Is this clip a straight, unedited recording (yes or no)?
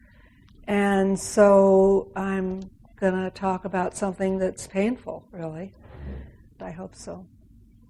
no